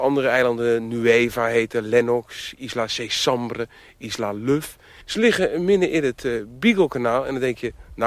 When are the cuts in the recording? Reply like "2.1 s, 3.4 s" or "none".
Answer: 5.0 s